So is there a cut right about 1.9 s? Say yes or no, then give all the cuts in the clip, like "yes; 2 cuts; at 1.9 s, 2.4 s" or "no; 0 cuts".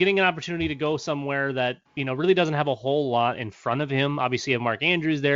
yes; 1 cut; at 1.9 s